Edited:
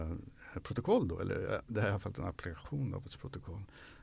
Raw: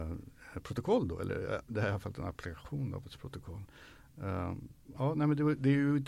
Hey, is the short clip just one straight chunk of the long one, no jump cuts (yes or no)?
yes